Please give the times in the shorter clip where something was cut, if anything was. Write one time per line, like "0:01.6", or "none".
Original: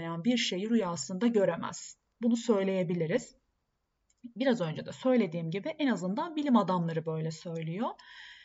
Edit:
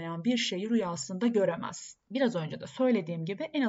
0:02.1